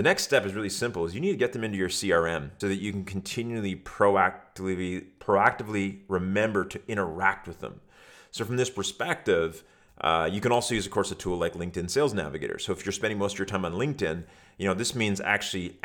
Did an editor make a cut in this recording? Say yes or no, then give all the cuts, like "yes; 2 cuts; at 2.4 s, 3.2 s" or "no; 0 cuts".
yes; 1 cut; at 2.6 s